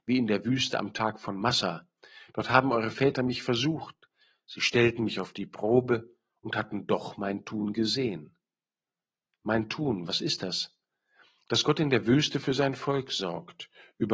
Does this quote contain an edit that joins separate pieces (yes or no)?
no